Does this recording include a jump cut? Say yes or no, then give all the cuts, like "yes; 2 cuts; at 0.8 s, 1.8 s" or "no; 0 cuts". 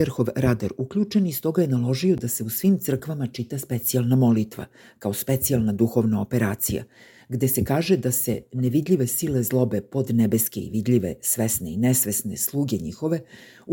no; 0 cuts